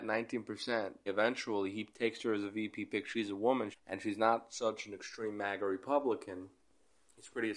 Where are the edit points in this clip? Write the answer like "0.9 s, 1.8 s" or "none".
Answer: 1.1 s, 3.7 s